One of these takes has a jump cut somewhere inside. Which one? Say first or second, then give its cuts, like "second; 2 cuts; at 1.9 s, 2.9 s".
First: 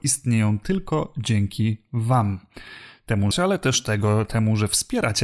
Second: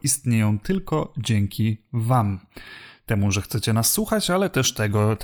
first; 1 cut; at 3.3 s